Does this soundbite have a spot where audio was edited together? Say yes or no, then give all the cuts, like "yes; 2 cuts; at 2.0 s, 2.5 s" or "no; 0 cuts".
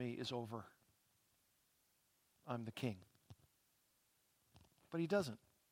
yes; 1 cut; at 2.3 s